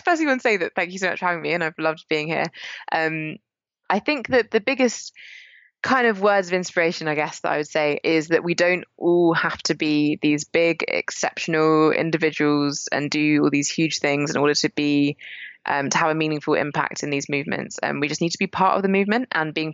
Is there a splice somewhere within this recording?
no; 0 cuts

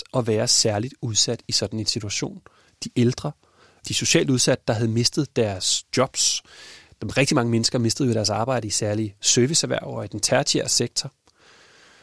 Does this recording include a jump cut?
no; 0 cuts

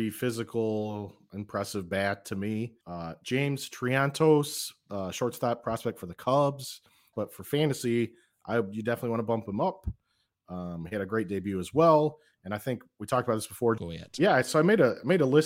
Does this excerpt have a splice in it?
yes; 3 cuts; at 2.8 s, 7.1 s, 13.8 s

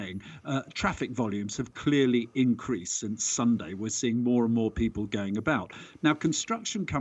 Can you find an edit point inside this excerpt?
no; 0 cuts

